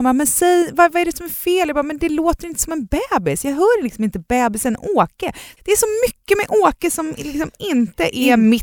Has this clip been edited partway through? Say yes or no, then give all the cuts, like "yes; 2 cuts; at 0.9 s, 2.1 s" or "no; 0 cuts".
no; 0 cuts